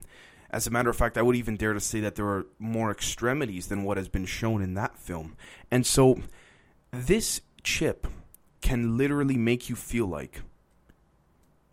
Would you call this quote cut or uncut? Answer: uncut